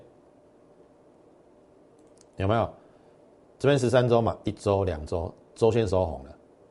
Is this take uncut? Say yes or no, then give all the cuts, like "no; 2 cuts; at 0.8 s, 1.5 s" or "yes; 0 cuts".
yes; 0 cuts